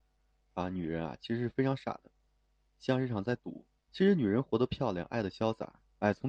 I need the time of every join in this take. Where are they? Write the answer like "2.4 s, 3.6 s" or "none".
3.9 s